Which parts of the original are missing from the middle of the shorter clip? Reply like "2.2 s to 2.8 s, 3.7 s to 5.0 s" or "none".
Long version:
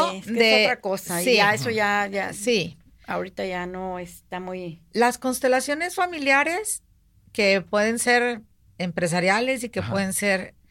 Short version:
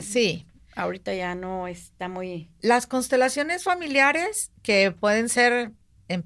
6.9 s to 7.2 s